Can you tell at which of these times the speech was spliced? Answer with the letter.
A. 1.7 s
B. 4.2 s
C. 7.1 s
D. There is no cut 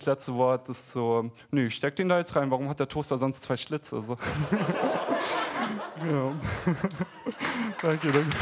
D